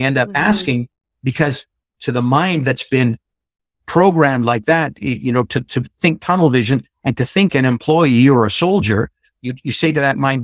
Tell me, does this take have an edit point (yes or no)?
yes